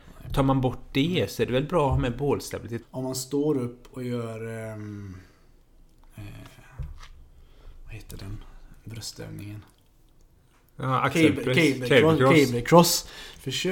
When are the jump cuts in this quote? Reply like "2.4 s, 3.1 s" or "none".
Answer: 2.8 s